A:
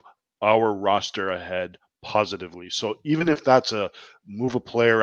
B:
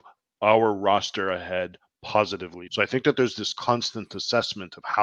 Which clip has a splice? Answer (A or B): B